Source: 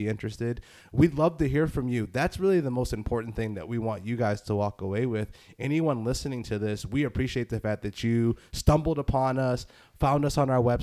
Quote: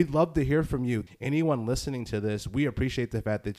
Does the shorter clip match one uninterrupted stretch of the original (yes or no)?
no